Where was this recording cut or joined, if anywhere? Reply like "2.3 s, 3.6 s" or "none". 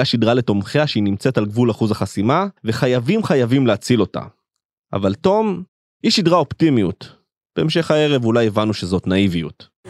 2.6 s